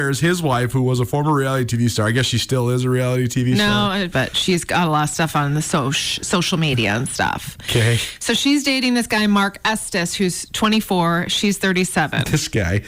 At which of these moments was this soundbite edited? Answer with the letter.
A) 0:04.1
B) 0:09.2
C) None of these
A